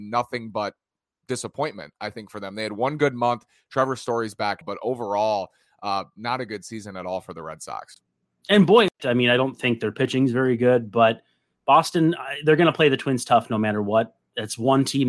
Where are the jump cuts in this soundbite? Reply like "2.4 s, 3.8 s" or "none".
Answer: 4.6 s, 9.0 s